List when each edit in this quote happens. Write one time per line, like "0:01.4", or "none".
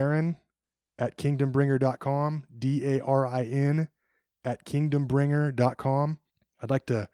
none